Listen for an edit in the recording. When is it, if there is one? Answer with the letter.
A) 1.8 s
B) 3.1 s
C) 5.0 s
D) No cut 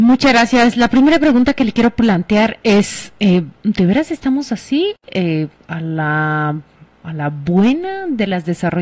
D